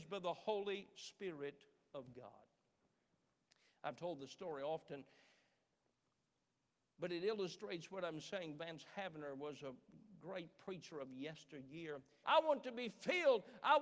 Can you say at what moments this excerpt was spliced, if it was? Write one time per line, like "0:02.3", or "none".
0:12.2

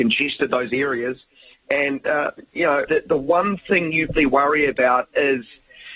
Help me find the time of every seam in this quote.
0:02.9
0:04.2

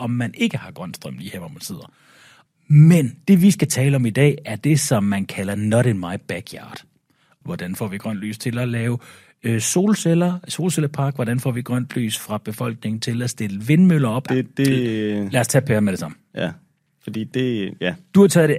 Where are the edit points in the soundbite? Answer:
0:07.4
0:14.3

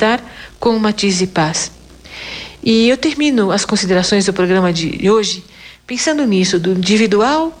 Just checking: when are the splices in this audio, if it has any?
none

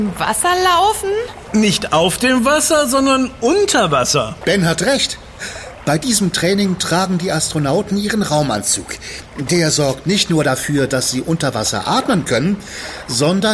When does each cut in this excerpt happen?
0:04.4

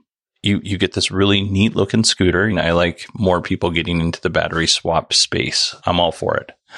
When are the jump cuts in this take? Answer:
0:02.5
0:05.8

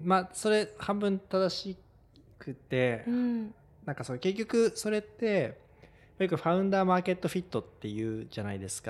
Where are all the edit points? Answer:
none

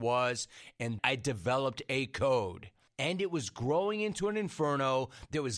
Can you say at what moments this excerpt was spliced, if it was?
0:01.0
0:02.9

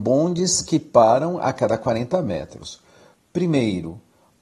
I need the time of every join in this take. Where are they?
0:03.1

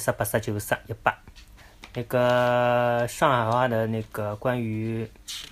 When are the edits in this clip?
none

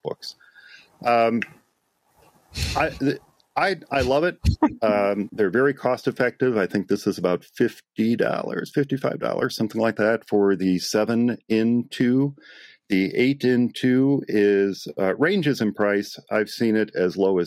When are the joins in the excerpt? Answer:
0:05.3

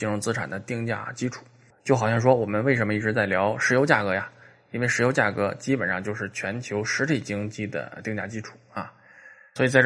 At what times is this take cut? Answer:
none

